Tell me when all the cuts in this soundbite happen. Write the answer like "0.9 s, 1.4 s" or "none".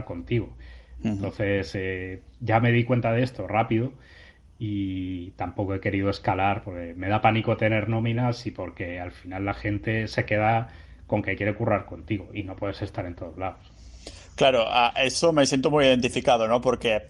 none